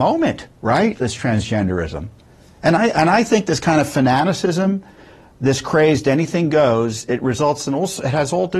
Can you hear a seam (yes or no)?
no